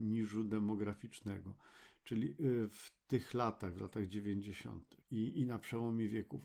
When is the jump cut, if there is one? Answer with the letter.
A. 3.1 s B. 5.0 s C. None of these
B